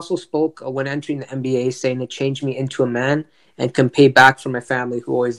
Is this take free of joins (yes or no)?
yes